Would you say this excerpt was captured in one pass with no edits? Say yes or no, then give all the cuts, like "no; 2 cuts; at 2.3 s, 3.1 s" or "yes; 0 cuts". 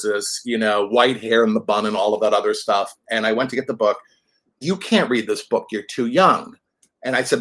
no; 1 cut; at 4.6 s